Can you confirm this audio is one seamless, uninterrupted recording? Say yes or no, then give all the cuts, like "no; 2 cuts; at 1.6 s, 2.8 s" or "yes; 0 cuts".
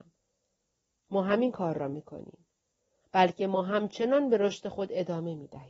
no; 2 cuts; at 1.0 s, 3.0 s